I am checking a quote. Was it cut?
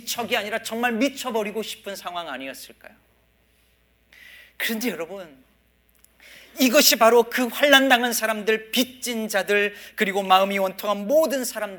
no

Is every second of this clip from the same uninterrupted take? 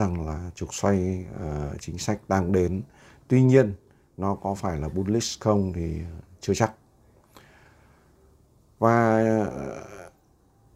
yes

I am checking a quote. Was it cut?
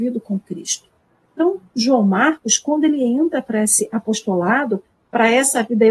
no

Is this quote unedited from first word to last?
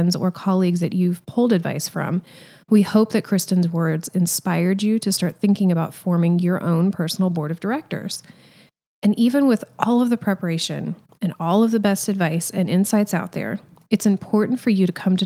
yes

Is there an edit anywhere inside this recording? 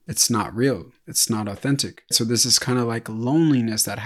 yes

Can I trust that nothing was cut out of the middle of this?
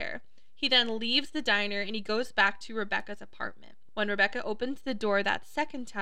yes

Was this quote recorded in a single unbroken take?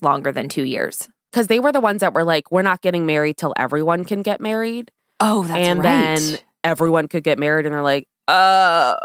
yes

